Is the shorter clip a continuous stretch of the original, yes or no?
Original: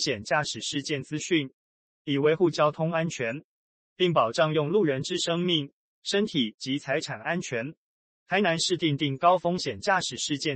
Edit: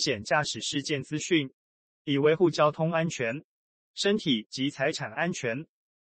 no